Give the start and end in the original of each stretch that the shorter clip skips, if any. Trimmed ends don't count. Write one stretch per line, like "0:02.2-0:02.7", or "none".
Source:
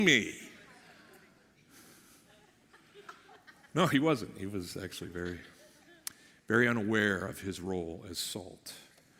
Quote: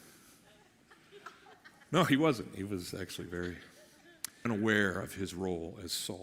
0:06.3-0:06.7

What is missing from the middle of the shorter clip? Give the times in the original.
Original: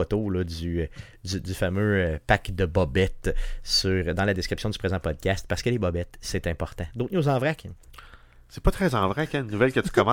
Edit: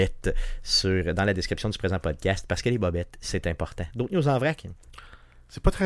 none

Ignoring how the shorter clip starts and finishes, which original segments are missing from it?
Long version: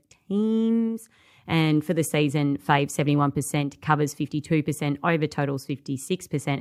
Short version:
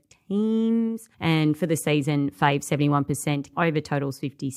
0:01.1-0:01.4
0:03.8-0:05.0

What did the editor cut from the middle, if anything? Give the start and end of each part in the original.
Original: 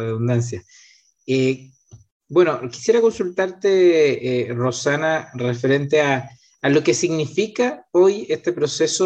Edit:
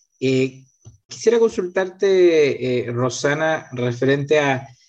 0:02.2-0:02.7

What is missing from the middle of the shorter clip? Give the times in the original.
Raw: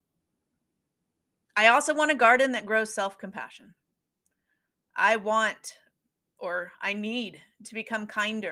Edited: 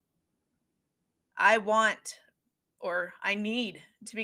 0:01.3-0:04.9

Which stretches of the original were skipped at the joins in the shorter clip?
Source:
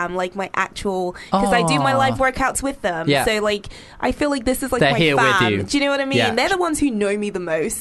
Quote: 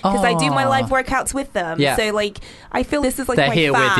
0:04.3-0:04.4

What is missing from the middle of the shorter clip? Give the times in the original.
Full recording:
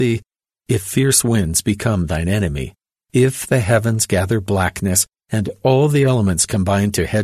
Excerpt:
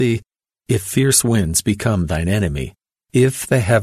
none

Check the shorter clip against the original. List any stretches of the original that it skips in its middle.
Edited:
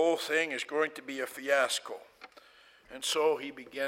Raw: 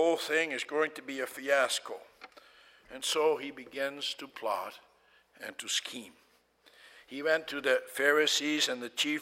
none

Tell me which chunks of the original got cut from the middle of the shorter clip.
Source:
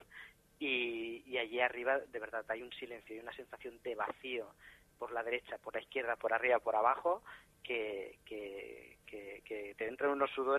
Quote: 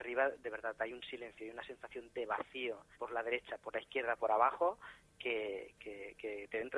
0:04.6-0:04.9
0:06.2-0:06.6
0:08.2-0:09.0

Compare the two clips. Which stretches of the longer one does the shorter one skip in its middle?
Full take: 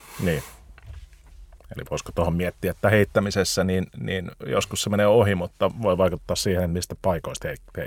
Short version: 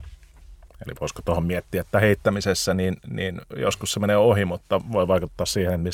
none

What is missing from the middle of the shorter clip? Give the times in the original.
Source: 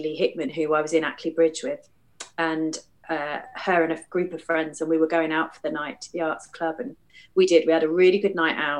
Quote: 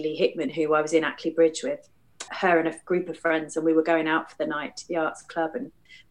0:02.3-0:03.5

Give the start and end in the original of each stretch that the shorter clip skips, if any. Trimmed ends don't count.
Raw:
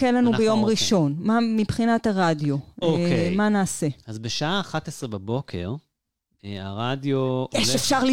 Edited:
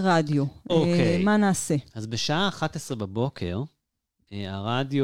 none

